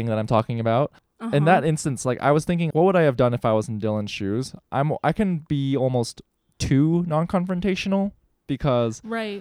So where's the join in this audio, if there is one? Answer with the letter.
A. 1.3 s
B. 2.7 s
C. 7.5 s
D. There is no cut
B